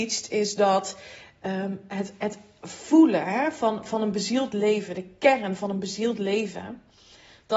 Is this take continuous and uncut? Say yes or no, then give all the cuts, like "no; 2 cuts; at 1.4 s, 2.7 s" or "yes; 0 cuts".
yes; 0 cuts